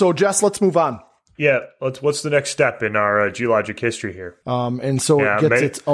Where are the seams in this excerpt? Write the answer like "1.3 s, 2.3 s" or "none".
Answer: 4.4 s

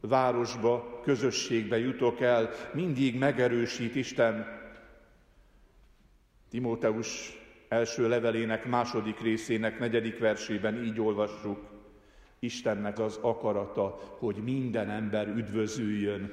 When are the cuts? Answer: 13.0 s

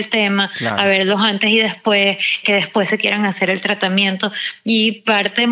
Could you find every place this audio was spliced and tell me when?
2.4 s

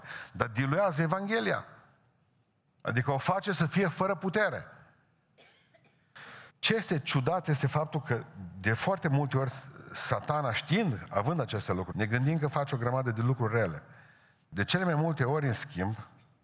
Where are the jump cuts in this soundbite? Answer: 6.5 s, 11.9 s

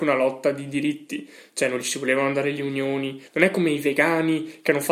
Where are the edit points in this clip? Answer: 3.3 s

